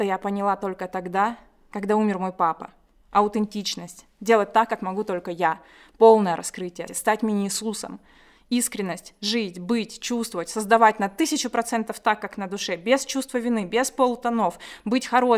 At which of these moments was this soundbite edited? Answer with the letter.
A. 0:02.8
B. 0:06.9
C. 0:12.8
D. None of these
B